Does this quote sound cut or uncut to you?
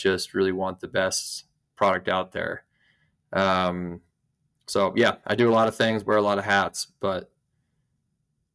uncut